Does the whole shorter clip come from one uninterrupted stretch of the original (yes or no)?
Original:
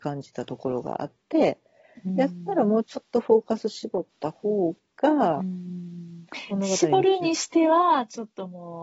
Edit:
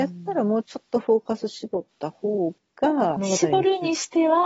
no